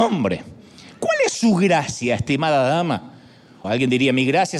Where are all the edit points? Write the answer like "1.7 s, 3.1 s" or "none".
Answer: 3.6 s